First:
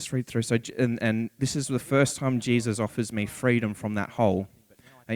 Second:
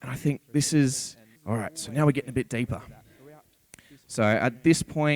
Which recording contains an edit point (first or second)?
second